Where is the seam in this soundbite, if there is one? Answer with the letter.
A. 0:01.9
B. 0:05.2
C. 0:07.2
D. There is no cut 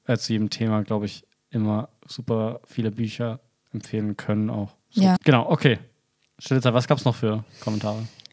B